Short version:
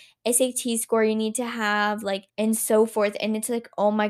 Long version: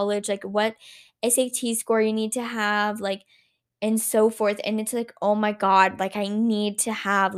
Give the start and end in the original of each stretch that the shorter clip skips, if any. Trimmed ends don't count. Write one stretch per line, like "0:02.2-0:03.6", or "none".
0:03.3-0:03.7